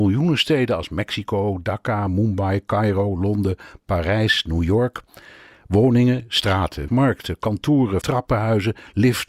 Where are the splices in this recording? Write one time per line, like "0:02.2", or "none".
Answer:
0:06.9
0:08.0